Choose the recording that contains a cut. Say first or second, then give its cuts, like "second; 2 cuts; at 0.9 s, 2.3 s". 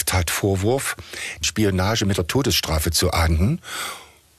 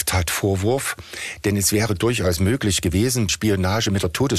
first; 1 cut; at 1.4 s